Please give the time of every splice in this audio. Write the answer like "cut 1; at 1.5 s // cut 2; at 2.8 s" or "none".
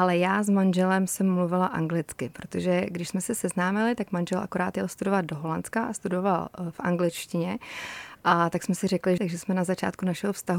cut 1; at 9.2 s